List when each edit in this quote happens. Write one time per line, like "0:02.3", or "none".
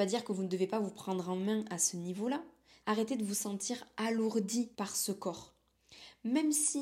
0:02.8
0:04.7